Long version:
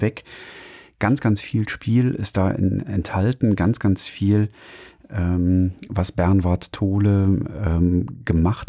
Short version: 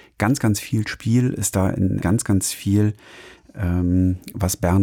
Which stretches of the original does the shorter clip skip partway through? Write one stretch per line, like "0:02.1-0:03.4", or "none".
0:02.8-0:03.6